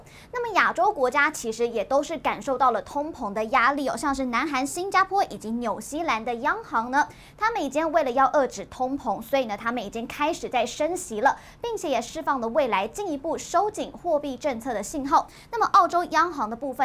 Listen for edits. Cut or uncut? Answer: uncut